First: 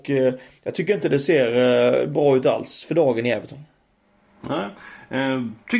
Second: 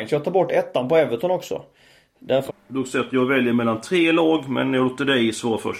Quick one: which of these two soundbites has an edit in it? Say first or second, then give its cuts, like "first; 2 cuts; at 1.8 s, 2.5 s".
second; 1 cut; at 2.5 s